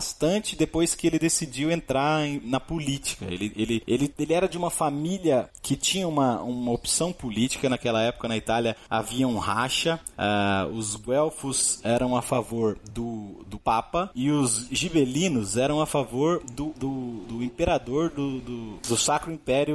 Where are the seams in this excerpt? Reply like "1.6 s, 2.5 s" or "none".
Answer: none

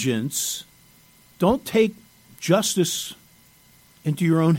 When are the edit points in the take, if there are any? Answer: 1.2 s

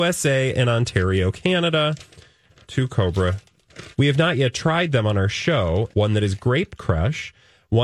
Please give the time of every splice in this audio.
3.9 s, 5.9 s

